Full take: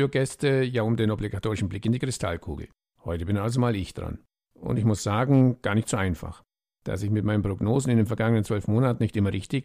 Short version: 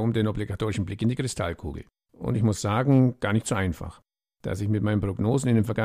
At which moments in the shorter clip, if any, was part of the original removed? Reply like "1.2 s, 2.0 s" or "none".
2.1 s